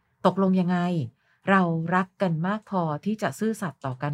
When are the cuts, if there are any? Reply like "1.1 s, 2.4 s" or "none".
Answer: none